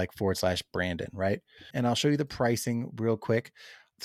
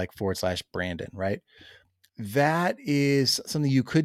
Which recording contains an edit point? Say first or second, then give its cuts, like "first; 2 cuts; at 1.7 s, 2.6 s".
first; 1 cut; at 1.7 s